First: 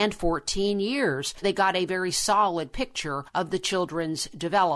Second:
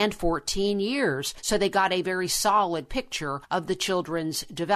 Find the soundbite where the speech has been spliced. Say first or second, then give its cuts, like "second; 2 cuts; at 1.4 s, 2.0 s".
first; 1 cut; at 1.4 s